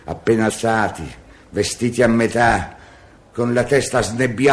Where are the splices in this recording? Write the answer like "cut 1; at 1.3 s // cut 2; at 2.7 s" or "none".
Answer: none